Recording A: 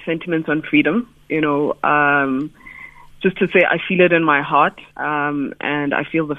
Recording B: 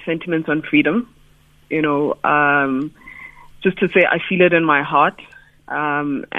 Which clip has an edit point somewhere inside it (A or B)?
A